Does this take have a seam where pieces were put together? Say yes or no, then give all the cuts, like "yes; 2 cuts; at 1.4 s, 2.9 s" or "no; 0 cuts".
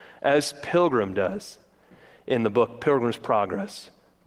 no; 0 cuts